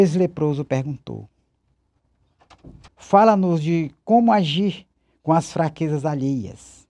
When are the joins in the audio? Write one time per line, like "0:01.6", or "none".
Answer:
0:02.9